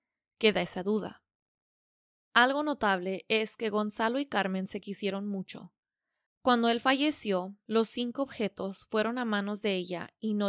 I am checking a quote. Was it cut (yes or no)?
no